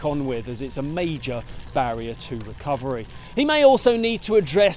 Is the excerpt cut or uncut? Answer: uncut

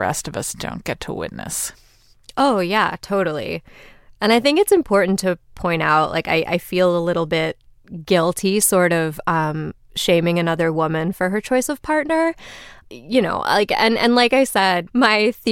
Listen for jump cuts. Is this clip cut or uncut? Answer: uncut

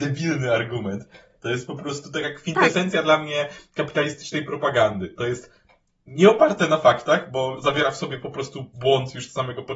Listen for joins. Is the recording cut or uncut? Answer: uncut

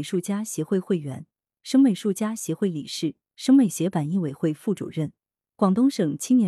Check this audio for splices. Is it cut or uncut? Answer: uncut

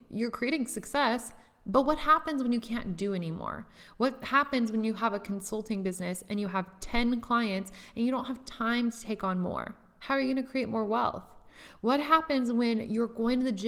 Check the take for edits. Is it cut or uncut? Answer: uncut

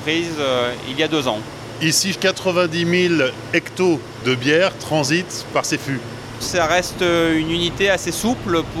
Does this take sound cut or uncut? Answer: cut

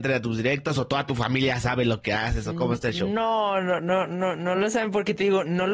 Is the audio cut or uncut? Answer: uncut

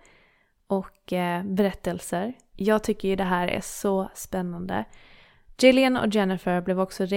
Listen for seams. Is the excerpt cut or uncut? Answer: cut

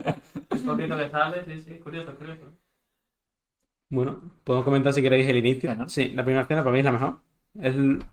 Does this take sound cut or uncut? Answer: cut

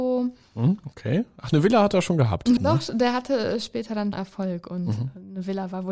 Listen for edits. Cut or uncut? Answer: cut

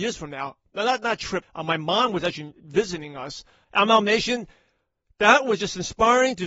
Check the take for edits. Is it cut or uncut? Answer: cut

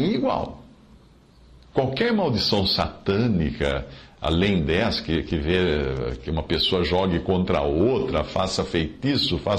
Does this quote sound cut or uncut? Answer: uncut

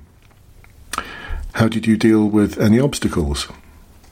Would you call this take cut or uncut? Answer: cut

